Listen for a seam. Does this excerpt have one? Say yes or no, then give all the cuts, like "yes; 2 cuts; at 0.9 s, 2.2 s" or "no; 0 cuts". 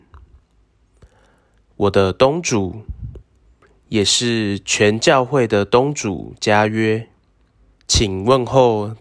yes; 1 cut; at 7.7 s